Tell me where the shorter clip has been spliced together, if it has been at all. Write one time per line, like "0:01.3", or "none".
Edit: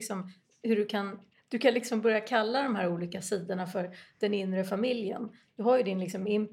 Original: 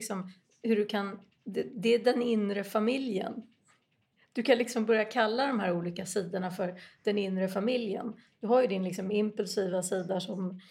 0:01.3